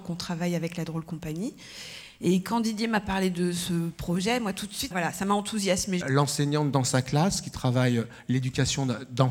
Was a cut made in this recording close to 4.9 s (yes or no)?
yes